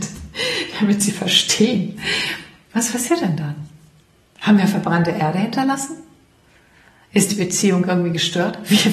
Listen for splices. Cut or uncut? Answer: uncut